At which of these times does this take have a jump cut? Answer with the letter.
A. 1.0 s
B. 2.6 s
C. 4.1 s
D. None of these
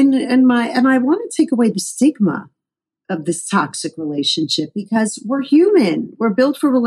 D